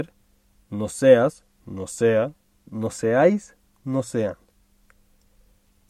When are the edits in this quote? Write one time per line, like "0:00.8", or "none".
none